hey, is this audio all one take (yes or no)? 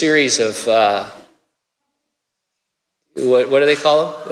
yes